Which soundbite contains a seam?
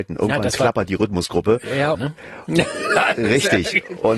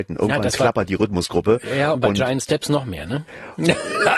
first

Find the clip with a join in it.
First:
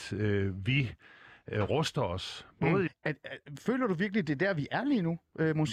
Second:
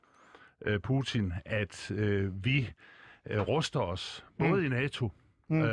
first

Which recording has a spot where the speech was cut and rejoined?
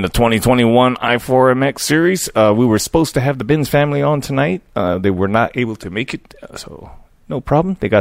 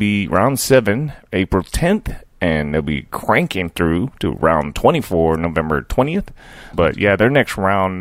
second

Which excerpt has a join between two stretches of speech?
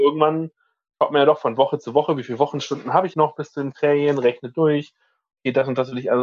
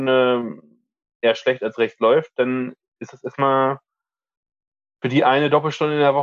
first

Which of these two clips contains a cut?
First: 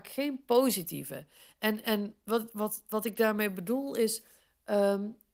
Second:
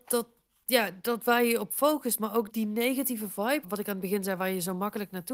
second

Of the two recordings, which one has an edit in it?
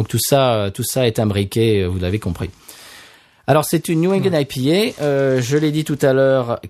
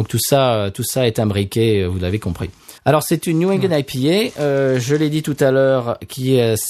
second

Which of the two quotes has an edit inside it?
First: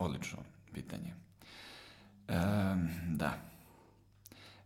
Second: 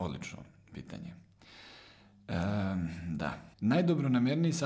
second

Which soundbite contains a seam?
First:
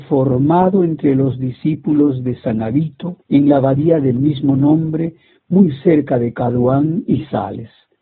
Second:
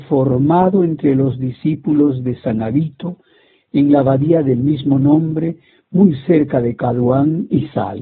first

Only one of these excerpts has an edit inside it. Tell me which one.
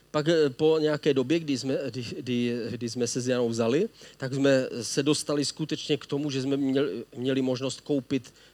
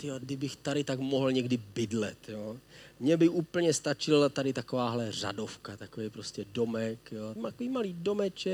second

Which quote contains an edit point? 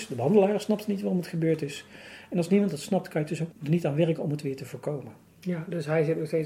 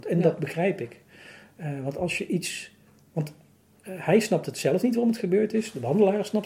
first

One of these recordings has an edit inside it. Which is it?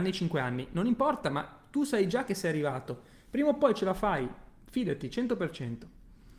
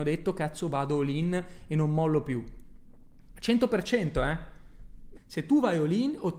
second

